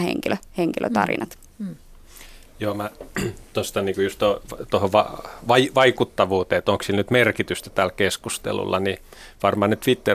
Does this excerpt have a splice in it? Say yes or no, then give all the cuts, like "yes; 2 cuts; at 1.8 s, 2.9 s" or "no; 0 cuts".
no; 0 cuts